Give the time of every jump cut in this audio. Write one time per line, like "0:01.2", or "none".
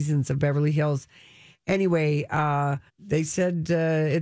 0:02.9